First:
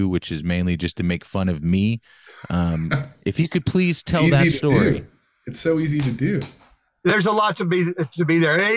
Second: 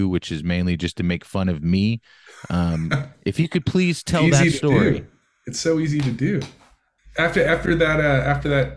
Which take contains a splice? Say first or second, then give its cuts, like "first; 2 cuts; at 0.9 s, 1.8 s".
second; 1 cut; at 7.0 s